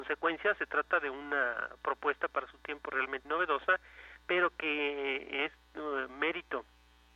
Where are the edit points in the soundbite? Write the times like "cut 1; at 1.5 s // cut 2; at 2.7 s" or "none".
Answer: cut 1; at 3.2 s